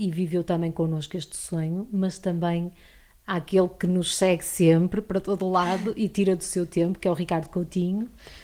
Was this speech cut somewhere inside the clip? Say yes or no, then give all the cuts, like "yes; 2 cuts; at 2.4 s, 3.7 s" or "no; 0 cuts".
no; 0 cuts